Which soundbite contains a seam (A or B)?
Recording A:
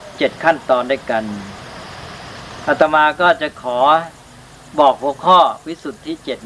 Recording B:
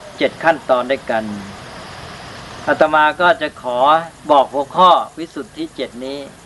B